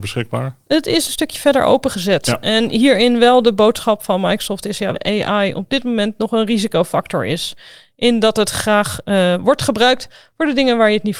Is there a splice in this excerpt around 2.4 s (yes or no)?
no